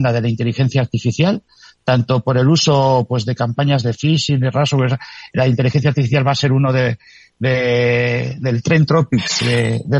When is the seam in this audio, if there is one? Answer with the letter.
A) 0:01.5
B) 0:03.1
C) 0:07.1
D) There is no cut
D